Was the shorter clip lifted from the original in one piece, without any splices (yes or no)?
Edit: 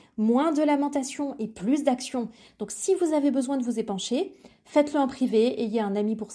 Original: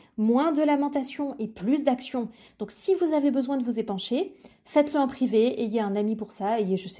yes